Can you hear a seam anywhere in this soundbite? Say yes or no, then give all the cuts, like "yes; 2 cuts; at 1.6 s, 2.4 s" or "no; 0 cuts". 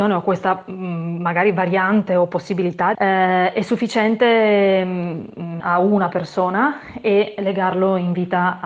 yes; 2 cuts; at 2.9 s, 5.6 s